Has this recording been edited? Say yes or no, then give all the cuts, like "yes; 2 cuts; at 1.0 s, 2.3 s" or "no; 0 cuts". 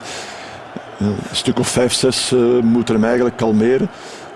no; 0 cuts